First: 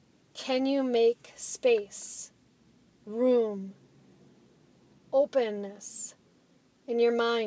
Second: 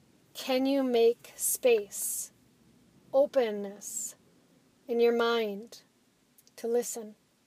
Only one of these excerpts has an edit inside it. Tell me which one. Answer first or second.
second